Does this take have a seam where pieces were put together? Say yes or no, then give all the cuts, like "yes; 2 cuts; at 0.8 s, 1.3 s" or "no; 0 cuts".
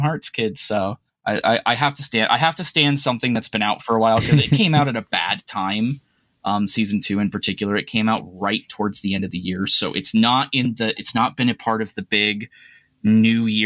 no; 0 cuts